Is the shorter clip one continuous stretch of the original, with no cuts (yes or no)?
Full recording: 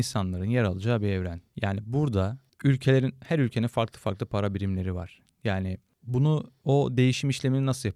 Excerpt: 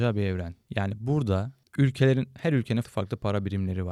no